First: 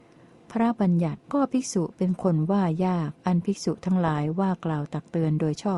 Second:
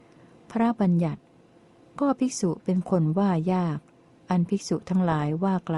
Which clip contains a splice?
first; 2 cuts; at 1.2 s, 3.2 s

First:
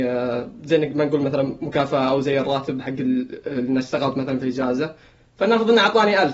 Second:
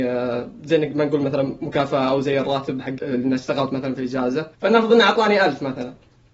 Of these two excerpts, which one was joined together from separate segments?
second; 2 cuts; at 3.0 s, 4.5 s

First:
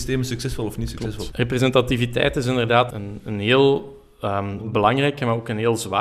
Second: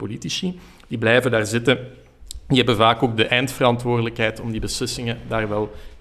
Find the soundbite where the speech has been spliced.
first; 2 cuts; at 1.3 s, 2.9 s

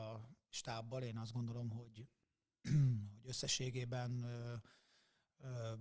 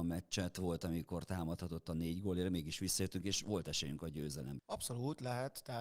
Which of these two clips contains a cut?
second; 1 cut; at 4.6 s

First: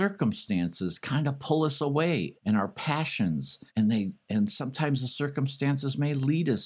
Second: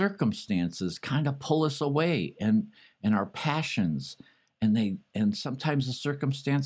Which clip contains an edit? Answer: first; 2 cuts; at 2.3 s, 3.7 s

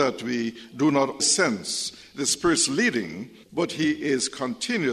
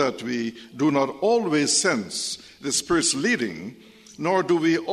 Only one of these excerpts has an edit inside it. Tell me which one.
first; 2 cuts; at 1.2 s, 3.4 s

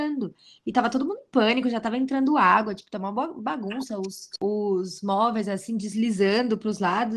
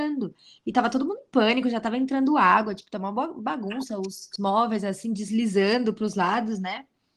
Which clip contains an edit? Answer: second; 1 cut; at 4.4 s

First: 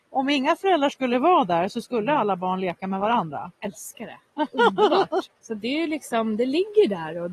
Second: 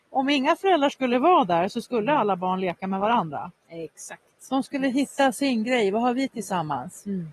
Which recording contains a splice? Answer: first; 2 cuts; at 3.5 s, 5.3 s

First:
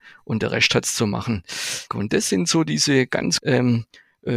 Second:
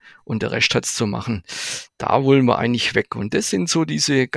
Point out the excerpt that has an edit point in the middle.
first; 2 cuts; at 1.9 s, 3.4 s

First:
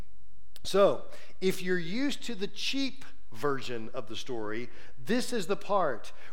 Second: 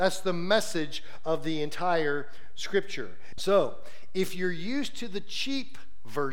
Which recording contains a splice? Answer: second; 1 cut; at 3.3 s

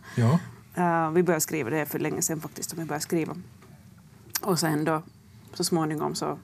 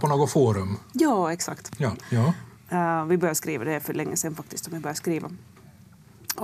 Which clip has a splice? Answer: second; 1 cut; at 2.0 s

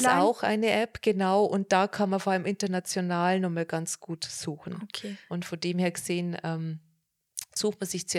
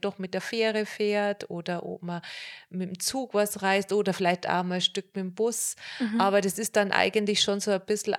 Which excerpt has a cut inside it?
first; 1 cut; at 5.3 s

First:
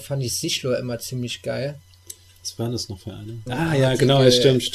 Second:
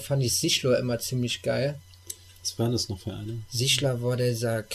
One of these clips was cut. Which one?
first; 1 cut; at 3.5 s

